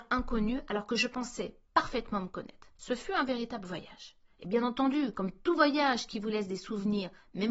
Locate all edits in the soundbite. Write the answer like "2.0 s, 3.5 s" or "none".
2.8 s